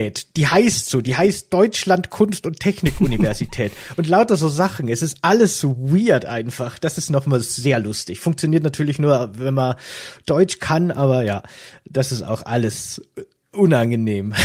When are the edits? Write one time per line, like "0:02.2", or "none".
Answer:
none